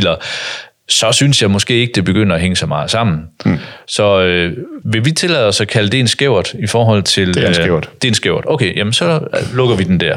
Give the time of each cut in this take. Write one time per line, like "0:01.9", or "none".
0:04.8